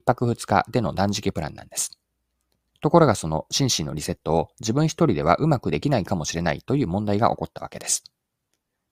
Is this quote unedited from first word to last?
no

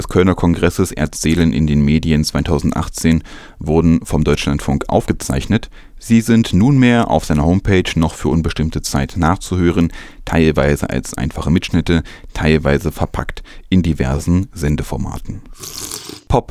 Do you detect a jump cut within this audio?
no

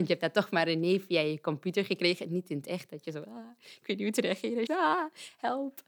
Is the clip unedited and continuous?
no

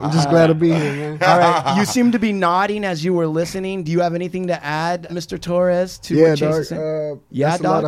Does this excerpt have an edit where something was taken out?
yes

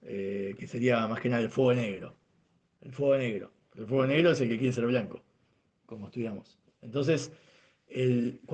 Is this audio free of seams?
yes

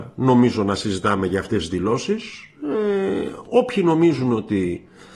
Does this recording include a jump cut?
no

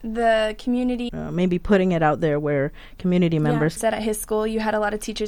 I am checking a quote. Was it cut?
yes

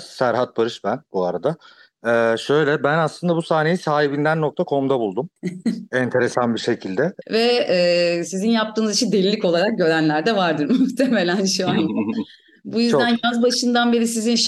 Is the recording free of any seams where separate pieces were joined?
no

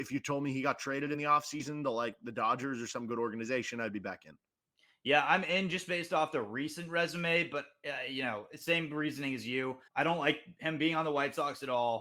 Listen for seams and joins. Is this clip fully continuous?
no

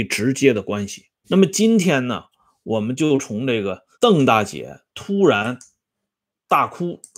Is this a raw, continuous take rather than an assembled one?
no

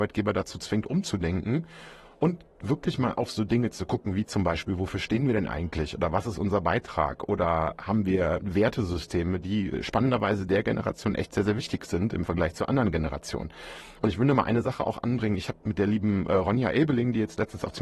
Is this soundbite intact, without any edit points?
yes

